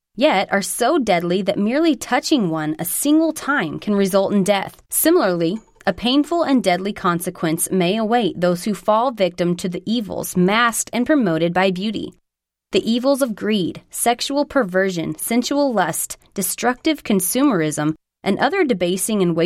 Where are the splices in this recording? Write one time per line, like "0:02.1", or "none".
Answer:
0:04.8
0:18.2

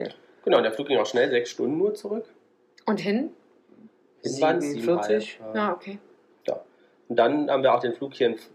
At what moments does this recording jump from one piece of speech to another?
none

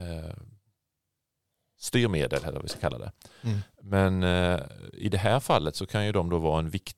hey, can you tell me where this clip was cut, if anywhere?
none

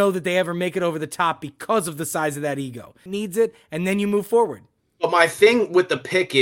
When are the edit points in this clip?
0:03.1

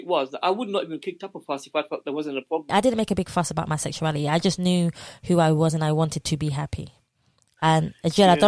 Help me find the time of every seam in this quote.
0:02.7

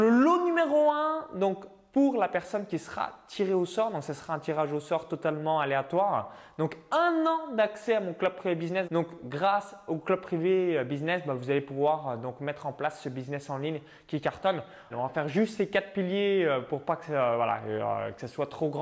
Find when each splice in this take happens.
0:08.8
0:14.9

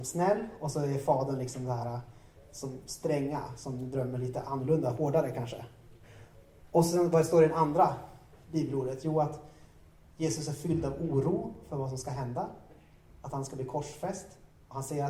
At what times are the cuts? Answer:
none

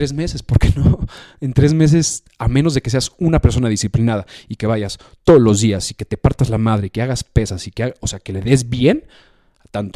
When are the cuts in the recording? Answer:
none

